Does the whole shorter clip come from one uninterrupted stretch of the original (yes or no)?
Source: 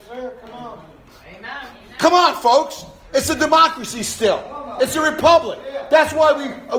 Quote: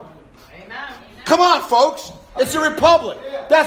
no